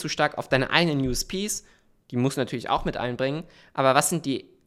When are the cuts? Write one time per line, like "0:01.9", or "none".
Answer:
none